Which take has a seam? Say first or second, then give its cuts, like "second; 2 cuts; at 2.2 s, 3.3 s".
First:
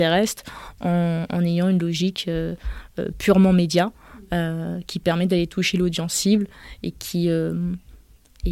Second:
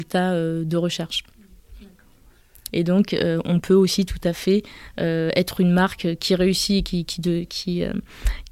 second; 1 cut; at 2.7 s